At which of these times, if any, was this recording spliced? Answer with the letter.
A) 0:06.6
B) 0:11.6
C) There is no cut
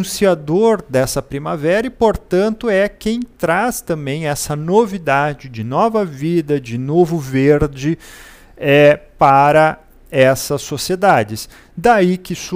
C